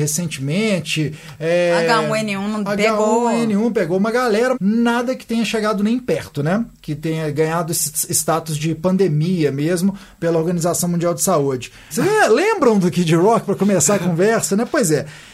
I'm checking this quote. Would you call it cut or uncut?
cut